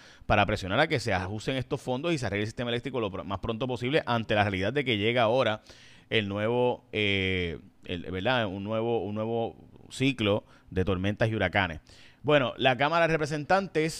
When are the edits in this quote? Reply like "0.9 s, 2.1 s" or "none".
none